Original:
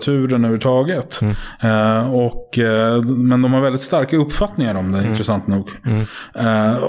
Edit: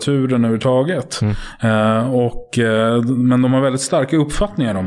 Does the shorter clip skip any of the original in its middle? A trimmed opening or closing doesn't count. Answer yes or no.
no